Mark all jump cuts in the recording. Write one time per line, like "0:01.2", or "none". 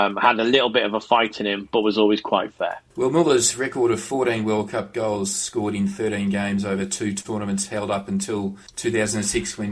0:08.7